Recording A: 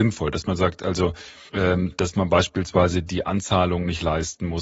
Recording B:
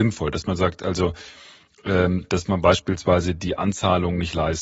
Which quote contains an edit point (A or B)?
A